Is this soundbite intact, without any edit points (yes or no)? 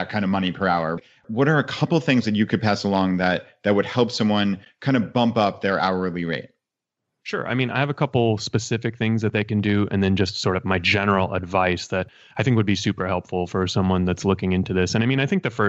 yes